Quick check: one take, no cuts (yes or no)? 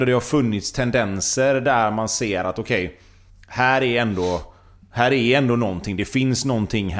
yes